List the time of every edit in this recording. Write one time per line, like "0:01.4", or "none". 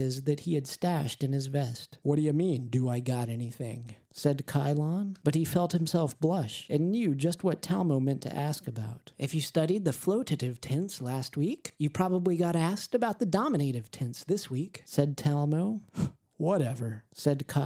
0:02.0